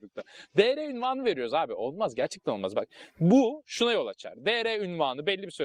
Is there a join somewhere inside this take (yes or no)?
no